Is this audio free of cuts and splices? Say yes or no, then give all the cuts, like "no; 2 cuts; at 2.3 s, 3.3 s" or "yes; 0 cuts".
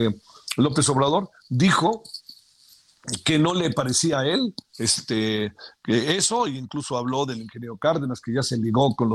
yes; 0 cuts